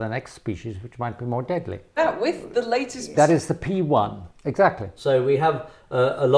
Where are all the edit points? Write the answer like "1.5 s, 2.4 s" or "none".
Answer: 2.0 s, 3.1 s, 5.0 s